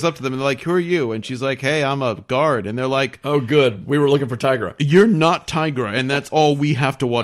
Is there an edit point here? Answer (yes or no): no